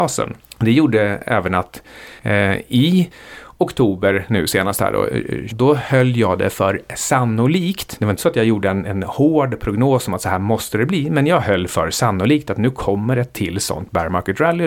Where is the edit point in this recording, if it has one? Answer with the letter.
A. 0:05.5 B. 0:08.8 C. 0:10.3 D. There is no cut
A